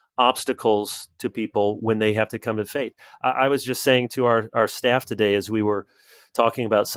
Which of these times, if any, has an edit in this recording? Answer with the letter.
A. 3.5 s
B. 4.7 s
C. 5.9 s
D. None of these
D